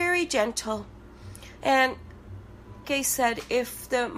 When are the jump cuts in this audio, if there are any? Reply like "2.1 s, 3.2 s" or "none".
1.6 s, 2.8 s